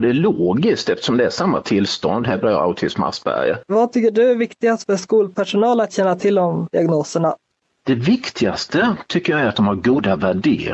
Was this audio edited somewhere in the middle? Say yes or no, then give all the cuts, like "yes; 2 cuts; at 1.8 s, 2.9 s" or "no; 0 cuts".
no; 0 cuts